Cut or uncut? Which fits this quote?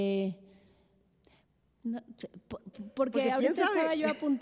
cut